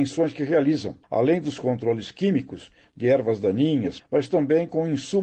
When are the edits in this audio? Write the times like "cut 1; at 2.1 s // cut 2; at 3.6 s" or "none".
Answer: cut 1; at 1.0 s // cut 2; at 4.0 s

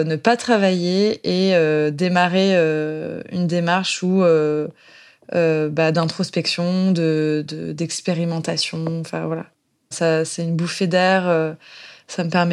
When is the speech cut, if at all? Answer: cut 1; at 9.9 s

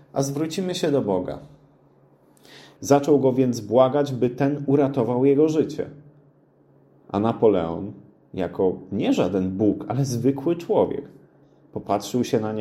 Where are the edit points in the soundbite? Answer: cut 1; at 2.8 s

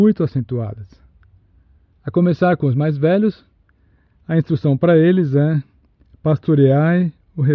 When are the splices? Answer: cut 1; at 1.9 s

